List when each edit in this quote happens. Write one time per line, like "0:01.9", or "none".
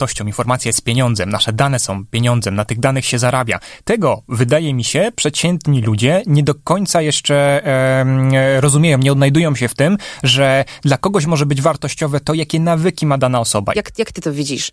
0:13.7